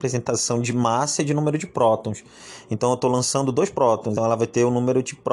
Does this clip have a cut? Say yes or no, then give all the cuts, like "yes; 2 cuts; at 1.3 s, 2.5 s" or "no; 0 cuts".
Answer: yes; 1 cut; at 4.2 s